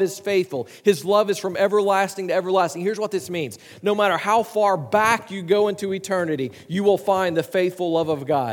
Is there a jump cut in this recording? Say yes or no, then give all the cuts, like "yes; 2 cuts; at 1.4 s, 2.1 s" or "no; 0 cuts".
no; 0 cuts